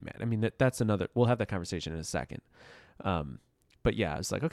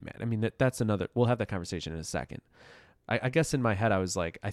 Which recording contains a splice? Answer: second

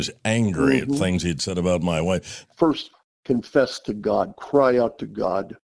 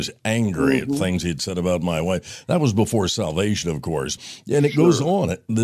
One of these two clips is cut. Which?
first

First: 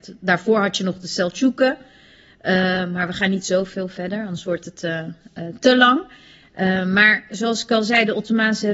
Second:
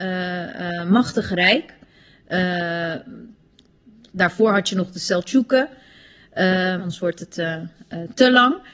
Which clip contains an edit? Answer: second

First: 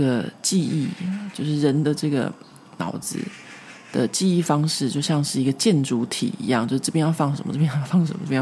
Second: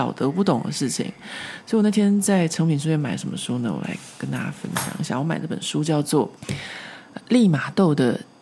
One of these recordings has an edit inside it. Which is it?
second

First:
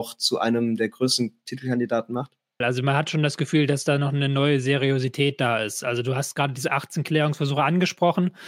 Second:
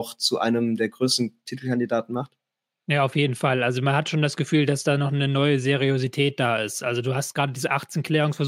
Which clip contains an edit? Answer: first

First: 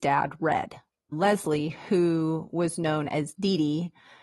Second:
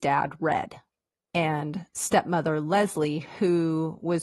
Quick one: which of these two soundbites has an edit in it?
first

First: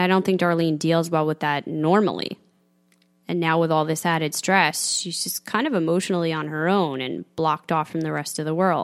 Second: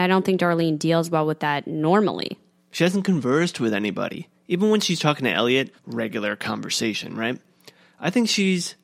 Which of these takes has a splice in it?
second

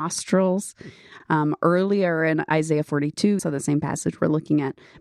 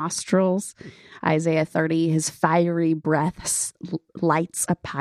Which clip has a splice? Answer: first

